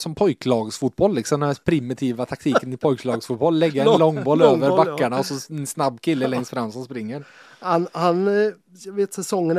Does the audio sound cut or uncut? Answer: uncut